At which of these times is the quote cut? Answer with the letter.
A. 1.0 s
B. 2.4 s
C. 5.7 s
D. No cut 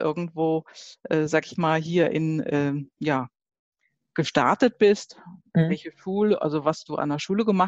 D